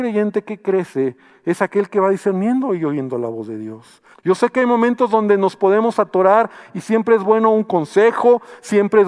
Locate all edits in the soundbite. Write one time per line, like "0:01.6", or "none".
0:04.1